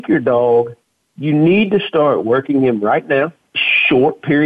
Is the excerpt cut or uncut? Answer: cut